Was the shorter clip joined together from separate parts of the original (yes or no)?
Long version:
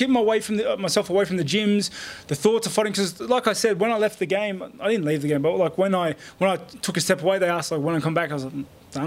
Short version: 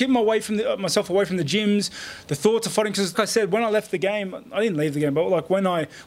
yes